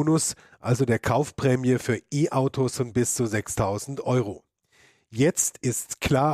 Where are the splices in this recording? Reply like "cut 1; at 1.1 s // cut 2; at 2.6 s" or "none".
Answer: none